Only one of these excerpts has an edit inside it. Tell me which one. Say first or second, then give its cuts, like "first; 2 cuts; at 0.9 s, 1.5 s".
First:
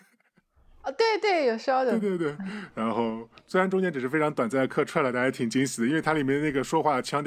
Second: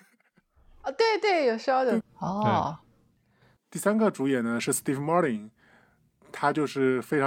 second; 1 cut; at 2.0 s